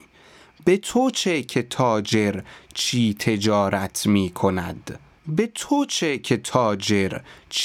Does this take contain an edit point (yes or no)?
yes